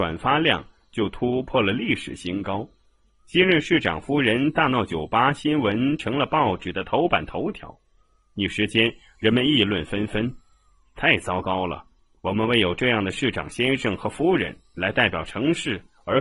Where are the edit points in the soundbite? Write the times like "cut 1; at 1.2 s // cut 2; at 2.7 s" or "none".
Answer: none